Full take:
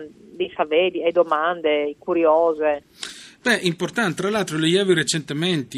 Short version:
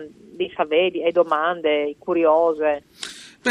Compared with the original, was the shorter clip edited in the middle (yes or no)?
no